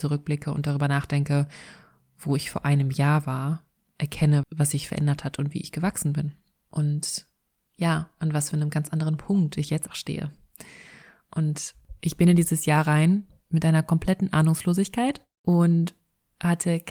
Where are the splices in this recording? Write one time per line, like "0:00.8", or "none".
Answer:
0:04.4
0:09.9